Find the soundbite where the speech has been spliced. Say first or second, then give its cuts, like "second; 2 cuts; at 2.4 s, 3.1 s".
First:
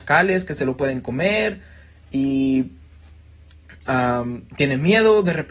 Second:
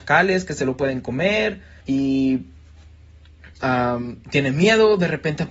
second; 1 cut; at 1.8 s